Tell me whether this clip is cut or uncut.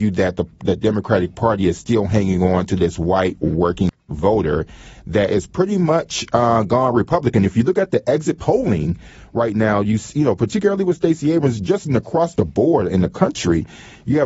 cut